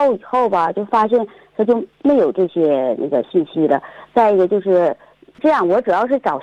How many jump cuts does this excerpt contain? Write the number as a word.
one